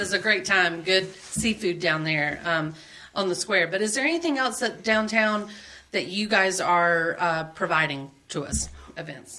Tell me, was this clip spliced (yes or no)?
no